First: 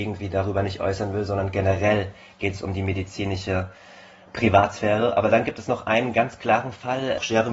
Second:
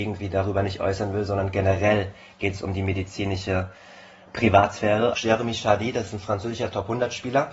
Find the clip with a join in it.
second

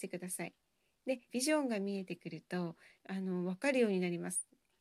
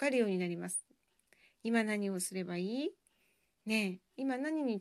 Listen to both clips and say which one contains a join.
first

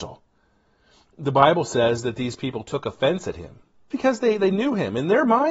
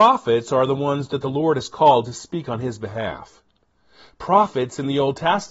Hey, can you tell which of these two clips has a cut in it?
first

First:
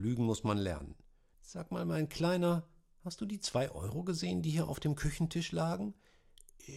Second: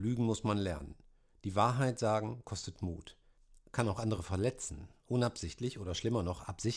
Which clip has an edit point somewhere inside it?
first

